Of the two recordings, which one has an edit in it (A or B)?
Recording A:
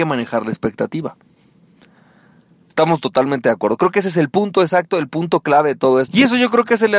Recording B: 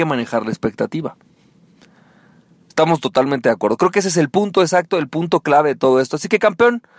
A